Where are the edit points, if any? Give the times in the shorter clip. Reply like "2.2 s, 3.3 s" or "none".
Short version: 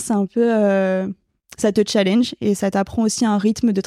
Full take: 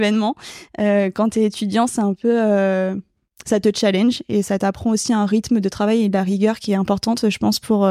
none